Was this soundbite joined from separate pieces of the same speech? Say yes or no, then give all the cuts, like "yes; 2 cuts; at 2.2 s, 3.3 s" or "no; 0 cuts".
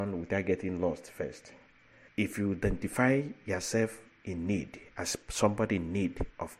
yes; 1 cut; at 2.1 s